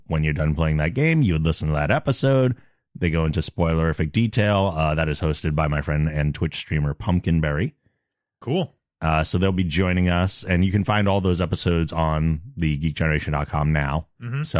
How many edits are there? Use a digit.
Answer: 0